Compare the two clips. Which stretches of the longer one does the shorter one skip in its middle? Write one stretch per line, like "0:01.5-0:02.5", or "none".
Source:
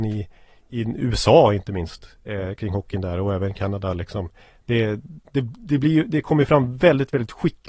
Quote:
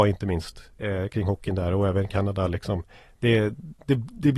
none